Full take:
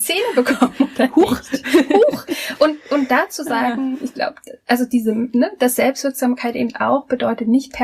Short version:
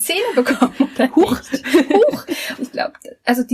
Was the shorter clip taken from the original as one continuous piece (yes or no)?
no